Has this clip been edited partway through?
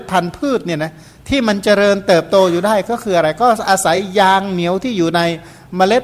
no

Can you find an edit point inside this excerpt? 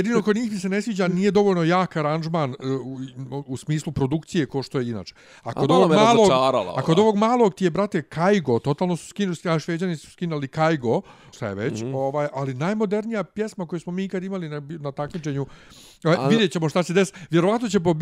yes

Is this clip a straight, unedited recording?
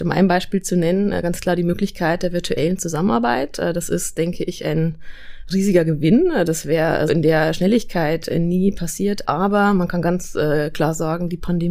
no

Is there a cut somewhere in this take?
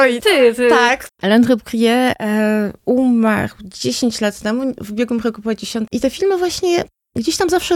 yes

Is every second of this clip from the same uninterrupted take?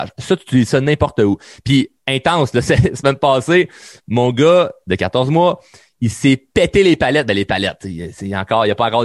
yes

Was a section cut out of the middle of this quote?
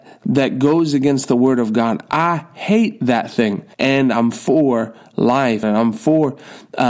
yes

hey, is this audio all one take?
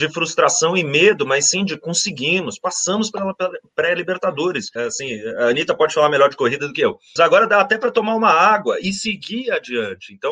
no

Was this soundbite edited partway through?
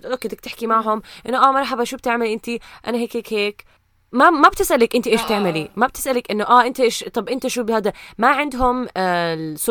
no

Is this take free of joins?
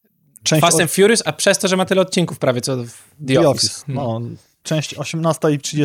yes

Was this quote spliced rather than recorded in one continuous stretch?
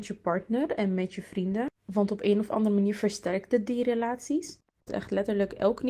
yes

